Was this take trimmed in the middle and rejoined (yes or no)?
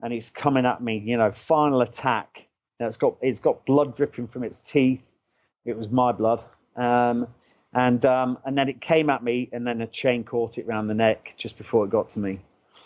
no